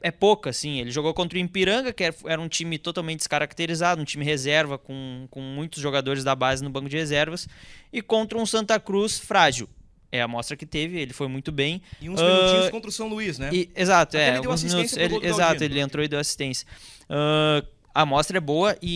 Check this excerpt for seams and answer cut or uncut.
uncut